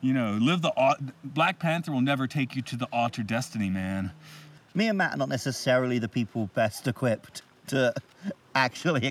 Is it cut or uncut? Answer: cut